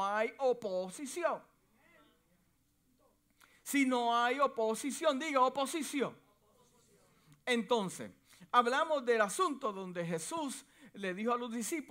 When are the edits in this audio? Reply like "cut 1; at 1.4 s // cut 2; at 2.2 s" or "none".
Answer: none